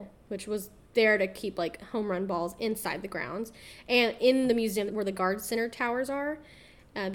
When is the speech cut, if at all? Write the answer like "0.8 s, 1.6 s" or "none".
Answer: 4.9 s

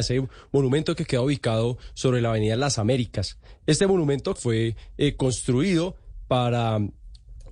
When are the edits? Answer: 4.4 s

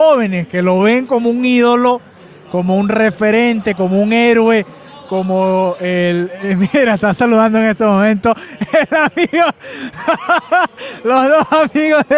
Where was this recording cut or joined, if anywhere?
none

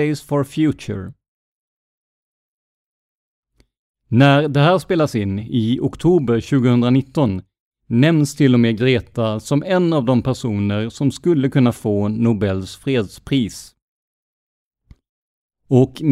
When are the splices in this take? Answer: none

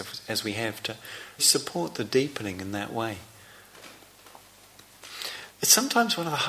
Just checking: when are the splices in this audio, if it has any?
1.4 s, 5.5 s

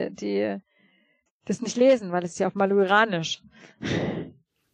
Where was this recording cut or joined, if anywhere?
1.3 s

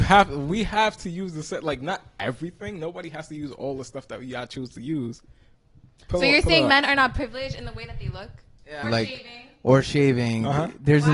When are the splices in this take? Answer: 8.8 s

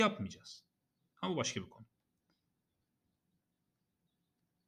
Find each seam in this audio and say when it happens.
1.1 s

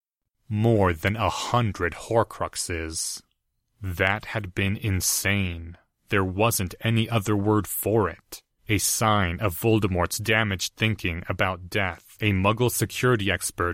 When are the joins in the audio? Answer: 12.1 s

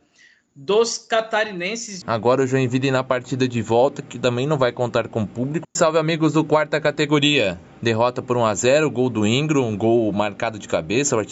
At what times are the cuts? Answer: 2.0 s, 5.6 s, 7.8 s

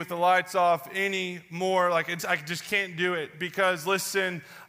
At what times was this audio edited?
2.2 s

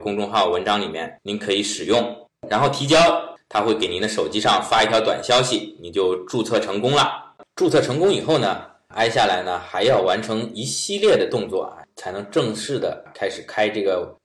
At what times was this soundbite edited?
none

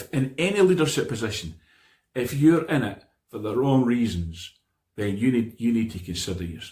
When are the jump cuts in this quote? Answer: none

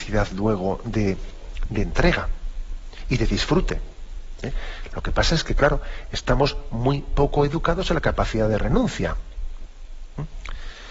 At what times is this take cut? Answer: 4.9 s

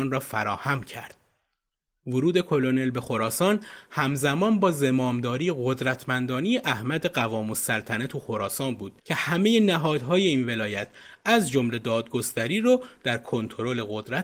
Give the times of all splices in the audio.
1.9 s, 9.0 s

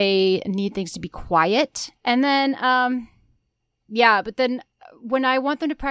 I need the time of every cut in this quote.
2.0 s

